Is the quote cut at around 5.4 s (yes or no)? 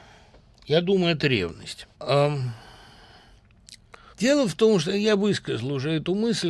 no